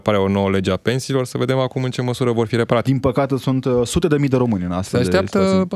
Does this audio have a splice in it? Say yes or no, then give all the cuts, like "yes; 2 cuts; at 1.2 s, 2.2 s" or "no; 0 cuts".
yes; 1 cut; at 2.8 s